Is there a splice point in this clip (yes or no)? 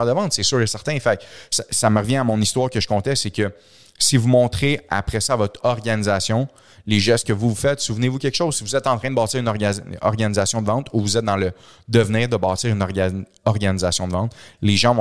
no